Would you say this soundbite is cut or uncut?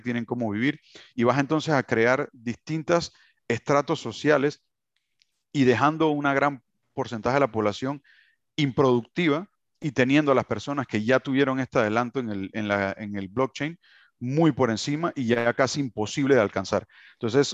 uncut